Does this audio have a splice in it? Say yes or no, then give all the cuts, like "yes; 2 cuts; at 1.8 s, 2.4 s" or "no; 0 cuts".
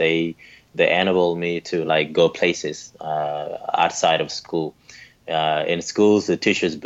no; 0 cuts